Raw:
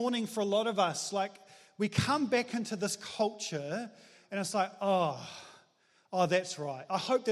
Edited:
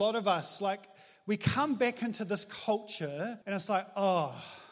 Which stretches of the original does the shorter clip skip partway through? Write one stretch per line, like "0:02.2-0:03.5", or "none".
0:03.9-0:04.3